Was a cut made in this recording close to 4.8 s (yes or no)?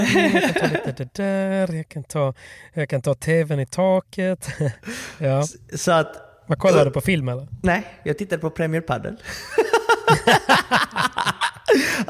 no